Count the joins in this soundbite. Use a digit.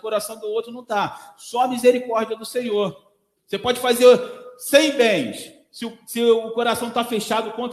1